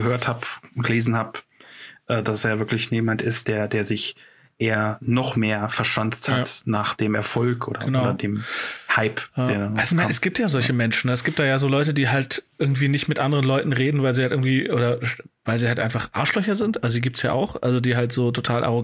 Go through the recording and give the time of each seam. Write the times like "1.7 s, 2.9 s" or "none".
none